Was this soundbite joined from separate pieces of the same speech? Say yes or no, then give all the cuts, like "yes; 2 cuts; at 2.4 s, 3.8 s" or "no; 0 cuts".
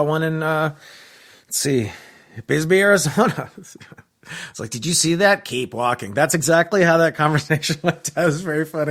no; 0 cuts